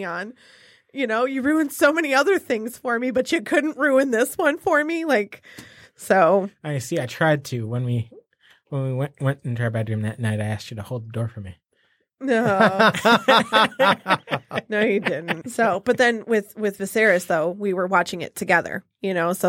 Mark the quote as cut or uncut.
cut